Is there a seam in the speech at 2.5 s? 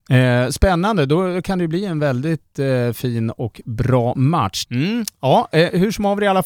no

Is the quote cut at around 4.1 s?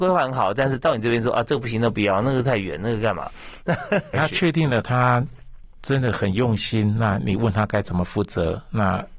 yes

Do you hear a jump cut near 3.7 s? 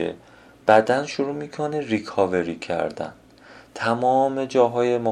no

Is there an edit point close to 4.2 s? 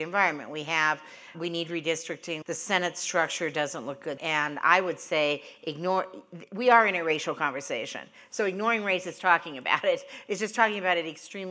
yes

